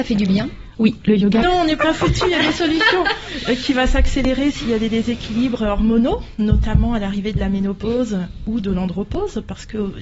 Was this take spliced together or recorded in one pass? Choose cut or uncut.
cut